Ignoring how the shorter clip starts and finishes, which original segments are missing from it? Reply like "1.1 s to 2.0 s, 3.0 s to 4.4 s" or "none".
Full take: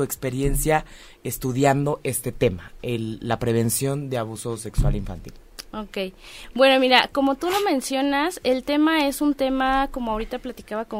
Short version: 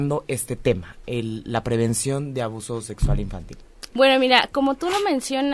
5.7 s to 6.5 s